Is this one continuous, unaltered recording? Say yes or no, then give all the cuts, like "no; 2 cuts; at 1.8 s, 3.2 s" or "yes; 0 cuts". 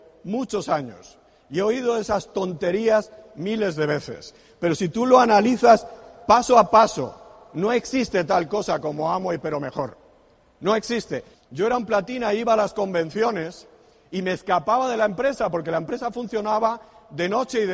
no; 1 cut; at 11.3 s